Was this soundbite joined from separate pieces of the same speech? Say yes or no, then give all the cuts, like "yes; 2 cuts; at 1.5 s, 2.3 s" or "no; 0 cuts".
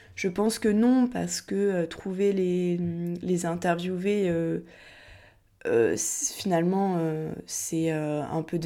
no; 0 cuts